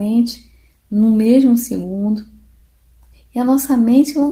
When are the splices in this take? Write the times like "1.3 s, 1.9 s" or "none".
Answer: none